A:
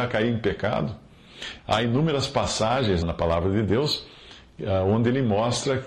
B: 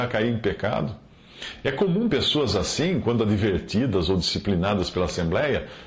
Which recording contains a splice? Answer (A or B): A